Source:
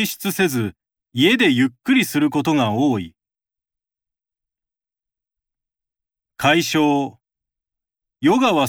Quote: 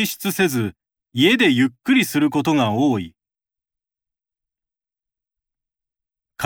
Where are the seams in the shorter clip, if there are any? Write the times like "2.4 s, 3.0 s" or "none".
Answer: none